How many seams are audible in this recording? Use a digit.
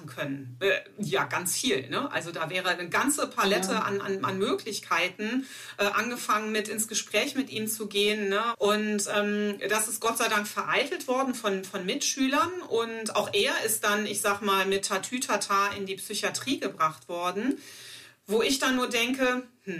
1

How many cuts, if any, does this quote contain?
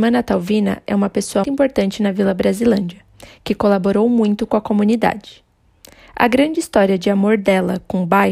1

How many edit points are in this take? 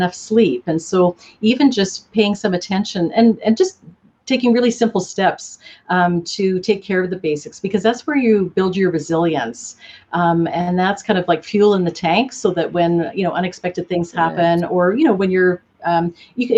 0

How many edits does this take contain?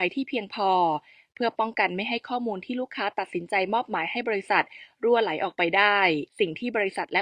1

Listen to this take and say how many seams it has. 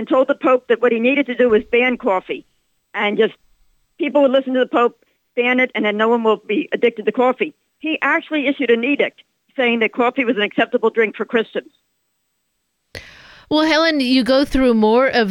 1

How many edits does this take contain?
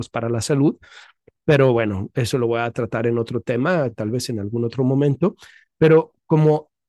0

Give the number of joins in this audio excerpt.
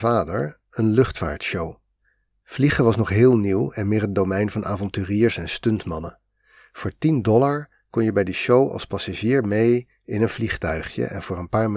0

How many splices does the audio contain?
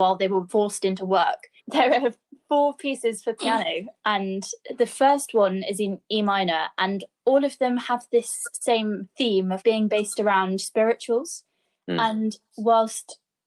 1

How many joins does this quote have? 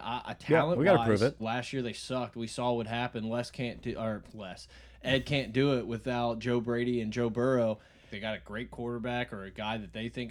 2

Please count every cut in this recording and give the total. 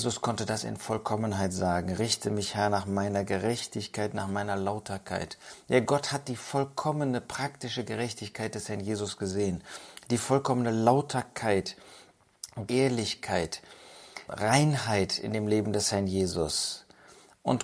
2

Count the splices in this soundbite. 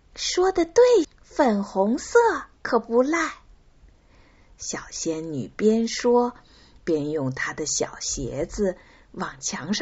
1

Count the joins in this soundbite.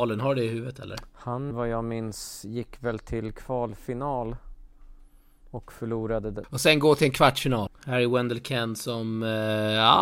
3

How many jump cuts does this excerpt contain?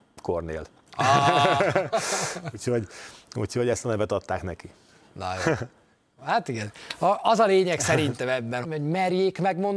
1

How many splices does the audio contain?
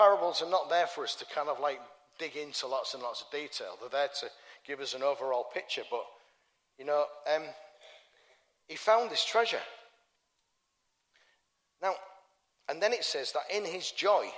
0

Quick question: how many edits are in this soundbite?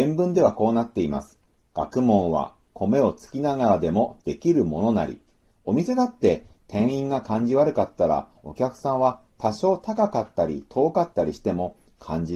1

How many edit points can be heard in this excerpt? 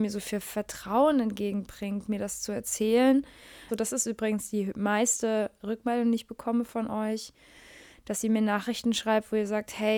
1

